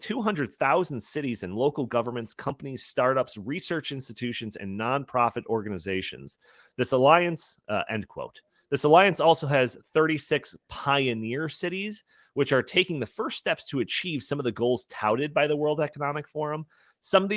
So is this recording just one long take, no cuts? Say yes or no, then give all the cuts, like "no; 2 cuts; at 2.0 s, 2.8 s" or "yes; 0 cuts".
yes; 0 cuts